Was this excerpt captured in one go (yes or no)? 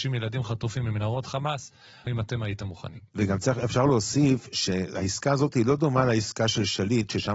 no